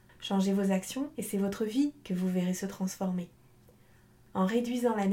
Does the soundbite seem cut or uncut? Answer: uncut